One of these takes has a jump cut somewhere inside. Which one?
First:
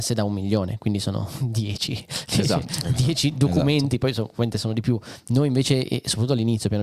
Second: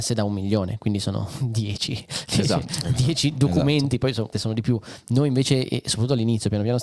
second; 1 cut; at 4.3 s

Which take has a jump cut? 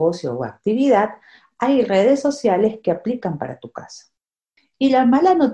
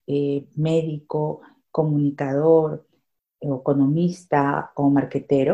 first; 1 cut; at 4.6 s

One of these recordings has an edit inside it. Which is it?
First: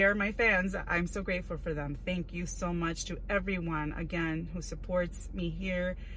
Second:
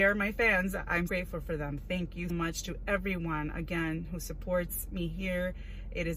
second; 2 cuts; at 1.1 s, 2.3 s

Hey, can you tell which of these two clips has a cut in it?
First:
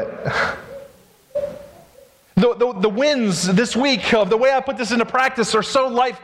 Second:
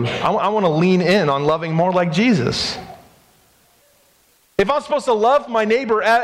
first; 1 cut; at 2.8 s

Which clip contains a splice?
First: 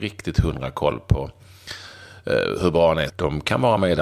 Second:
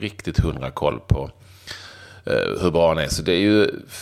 first; 1 cut; at 3.1 s

